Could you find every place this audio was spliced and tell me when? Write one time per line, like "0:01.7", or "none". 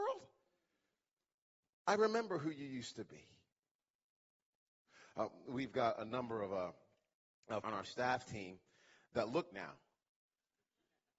0:07.6
0:09.5